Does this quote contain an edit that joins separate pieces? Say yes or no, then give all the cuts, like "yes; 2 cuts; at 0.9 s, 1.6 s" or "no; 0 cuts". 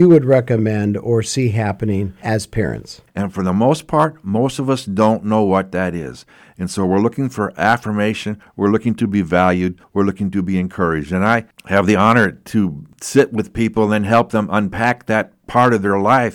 yes; 1 cut; at 3.1 s